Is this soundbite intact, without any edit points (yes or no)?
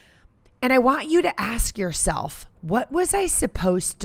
no